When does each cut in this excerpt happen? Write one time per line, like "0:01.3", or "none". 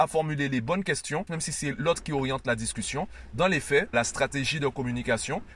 0:01.3
0:03.9